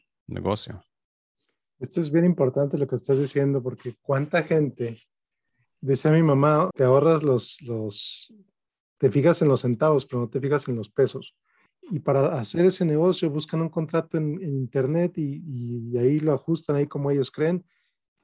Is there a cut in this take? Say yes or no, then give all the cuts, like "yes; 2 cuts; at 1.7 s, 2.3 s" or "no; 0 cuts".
yes; 2 cuts; at 6.7 s, 11.7 s